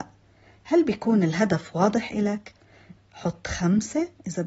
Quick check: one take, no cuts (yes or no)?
no